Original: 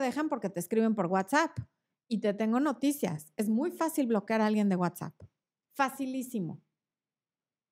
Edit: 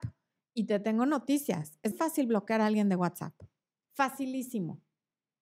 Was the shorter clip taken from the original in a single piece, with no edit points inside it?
no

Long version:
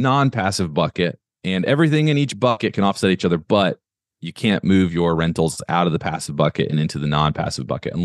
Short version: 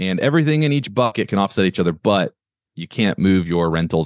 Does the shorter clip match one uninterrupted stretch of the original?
yes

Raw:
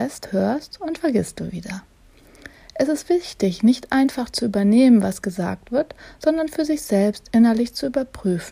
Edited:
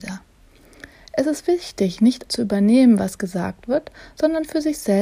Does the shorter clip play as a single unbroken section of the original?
no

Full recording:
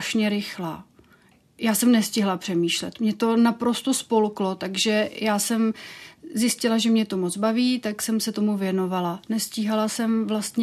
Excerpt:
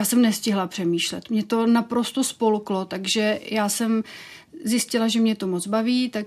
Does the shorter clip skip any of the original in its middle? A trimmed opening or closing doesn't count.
no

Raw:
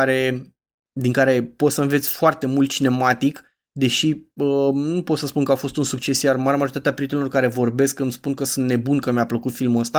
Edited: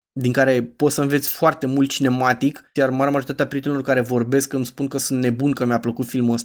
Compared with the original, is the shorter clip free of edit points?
no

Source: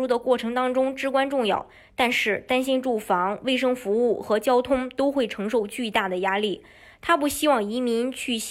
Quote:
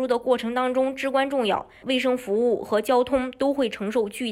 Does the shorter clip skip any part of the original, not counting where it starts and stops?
yes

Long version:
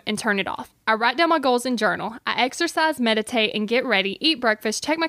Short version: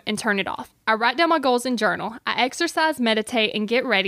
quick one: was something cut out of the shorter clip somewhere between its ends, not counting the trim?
no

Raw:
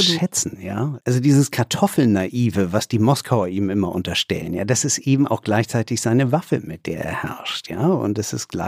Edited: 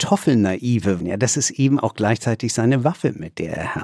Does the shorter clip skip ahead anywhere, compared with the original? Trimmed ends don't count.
yes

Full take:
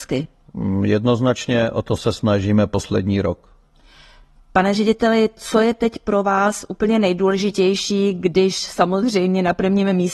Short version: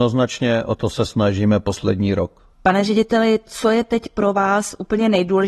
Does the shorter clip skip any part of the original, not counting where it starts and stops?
yes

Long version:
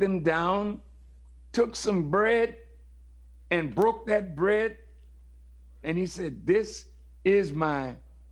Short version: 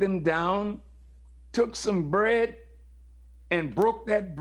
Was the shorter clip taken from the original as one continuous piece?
yes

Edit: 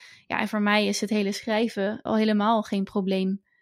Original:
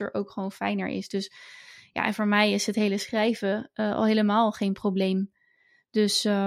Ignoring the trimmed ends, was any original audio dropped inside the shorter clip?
yes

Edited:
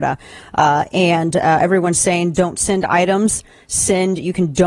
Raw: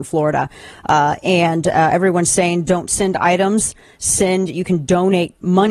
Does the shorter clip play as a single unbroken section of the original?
yes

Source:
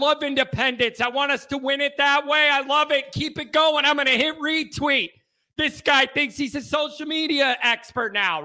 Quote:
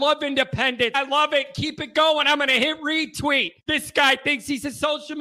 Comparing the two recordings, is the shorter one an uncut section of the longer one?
no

